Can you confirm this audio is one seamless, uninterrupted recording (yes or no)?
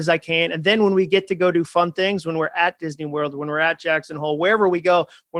yes